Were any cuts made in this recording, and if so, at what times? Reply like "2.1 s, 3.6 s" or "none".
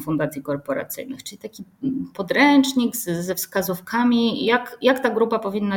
none

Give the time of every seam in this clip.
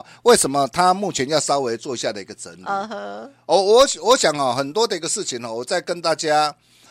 none

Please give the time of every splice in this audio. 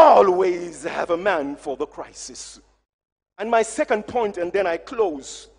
none

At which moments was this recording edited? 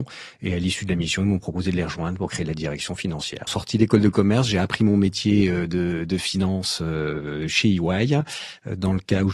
3.5 s

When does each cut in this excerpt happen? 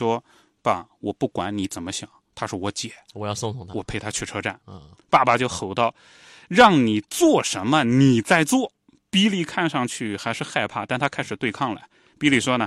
none

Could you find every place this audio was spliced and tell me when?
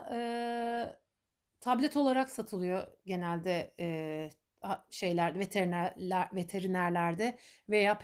none

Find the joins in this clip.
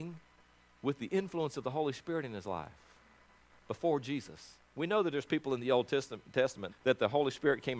6.7 s

